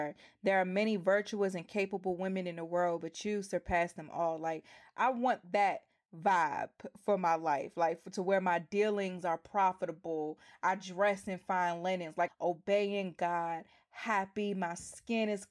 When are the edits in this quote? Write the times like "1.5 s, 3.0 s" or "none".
12.3 s